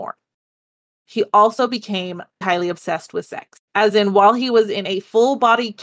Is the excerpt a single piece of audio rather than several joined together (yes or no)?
no